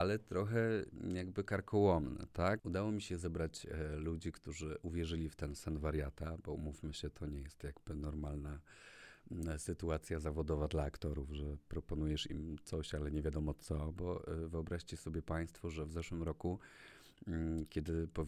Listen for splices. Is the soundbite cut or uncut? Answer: cut